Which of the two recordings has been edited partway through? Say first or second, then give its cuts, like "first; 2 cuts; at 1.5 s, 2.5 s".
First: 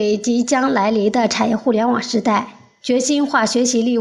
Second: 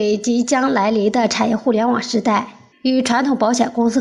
second; 1 cut; at 2.7 s